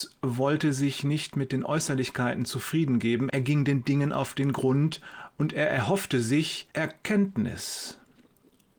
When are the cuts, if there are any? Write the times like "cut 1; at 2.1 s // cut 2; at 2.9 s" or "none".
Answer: cut 1; at 3.3 s // cut 2; at 6.7 s